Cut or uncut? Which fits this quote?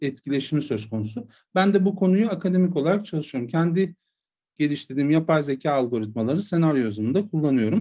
uncut